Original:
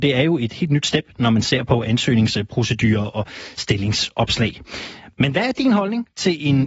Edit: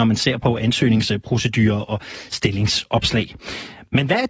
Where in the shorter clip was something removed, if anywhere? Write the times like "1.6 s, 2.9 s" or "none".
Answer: none

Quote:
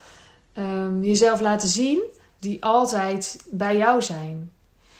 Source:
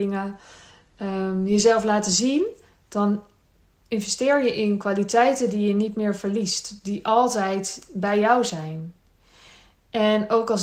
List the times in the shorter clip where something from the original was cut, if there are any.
2.4 s

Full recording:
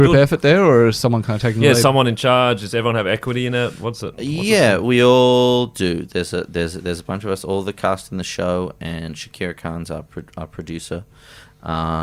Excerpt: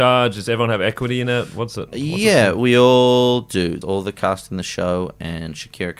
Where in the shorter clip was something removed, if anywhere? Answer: 3.8 s

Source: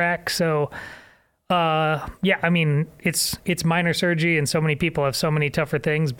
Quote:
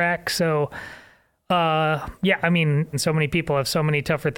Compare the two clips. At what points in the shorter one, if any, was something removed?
2.9 s

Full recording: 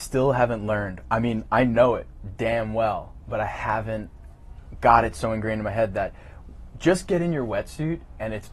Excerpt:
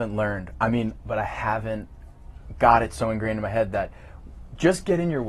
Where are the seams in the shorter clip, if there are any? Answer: 1.0 s

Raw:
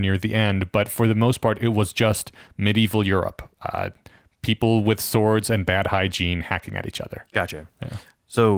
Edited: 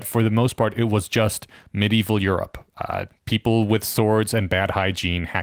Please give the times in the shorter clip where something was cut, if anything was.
3.2 s

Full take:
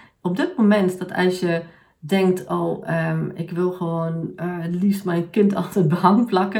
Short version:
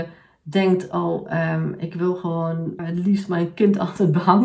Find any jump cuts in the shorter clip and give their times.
2.8 s

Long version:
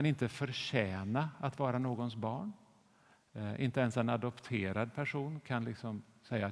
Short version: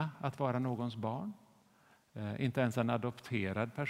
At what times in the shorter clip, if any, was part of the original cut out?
none

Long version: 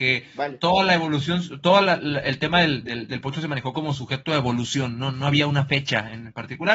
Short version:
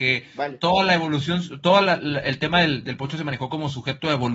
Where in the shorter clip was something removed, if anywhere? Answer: 2.8 s

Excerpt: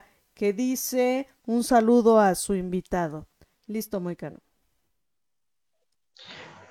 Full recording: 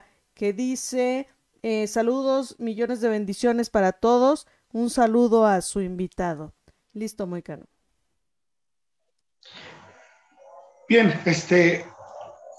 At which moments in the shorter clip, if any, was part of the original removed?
1.4 s

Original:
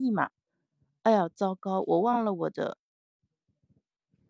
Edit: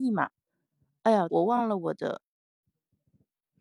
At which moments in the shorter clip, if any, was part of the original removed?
1.3 s

